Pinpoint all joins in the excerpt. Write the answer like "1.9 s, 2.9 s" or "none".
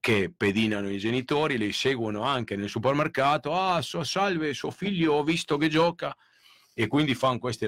none